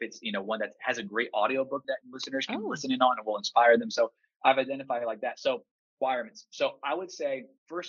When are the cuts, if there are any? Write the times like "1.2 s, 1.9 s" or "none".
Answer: none